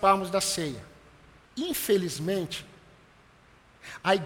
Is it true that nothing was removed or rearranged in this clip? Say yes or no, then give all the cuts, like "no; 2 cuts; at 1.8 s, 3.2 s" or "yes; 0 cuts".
no; 1 cut; at 1.5 s